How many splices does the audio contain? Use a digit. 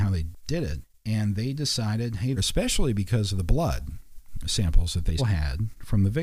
2